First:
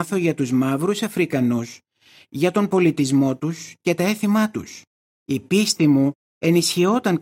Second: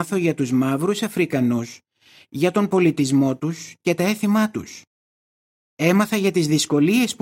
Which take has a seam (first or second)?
first